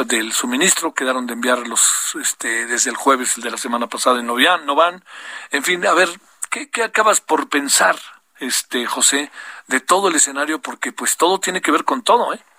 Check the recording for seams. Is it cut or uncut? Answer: uncut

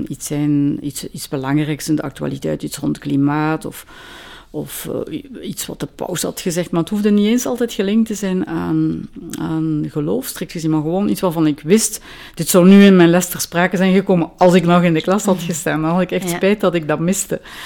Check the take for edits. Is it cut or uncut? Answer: uncut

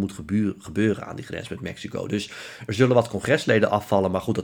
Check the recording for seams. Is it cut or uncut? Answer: uncut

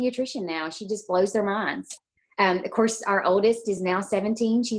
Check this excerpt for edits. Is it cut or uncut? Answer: uncut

